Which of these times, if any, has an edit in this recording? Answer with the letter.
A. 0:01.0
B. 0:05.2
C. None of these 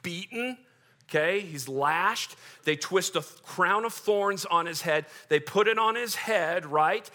C